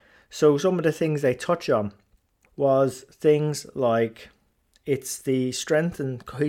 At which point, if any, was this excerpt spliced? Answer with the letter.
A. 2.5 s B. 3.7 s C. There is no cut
A